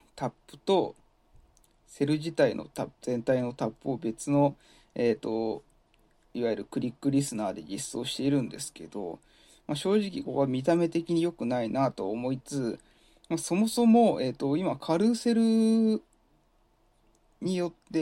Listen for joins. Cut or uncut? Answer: cut